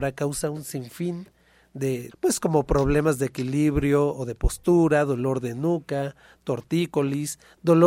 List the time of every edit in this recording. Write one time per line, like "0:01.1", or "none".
0:02.1